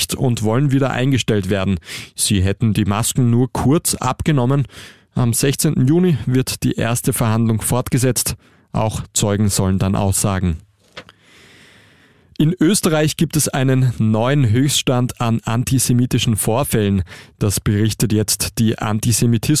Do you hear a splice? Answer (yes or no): no